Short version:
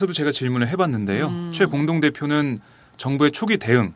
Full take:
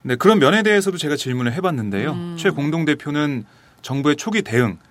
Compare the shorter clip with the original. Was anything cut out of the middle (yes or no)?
no